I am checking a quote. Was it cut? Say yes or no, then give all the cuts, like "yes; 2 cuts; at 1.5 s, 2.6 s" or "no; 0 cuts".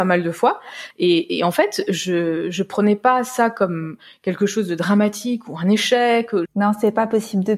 yes; 2 cuts; at 0.9 s, 6.4 s